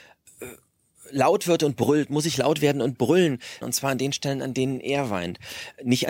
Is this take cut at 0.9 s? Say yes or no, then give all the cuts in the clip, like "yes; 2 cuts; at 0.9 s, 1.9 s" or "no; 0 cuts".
no; 1 cut; at 3.6 s